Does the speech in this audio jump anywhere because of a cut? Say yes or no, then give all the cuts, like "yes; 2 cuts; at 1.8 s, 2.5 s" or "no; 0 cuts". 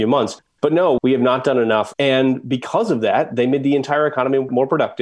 yes; 1 cut; at 1.9 s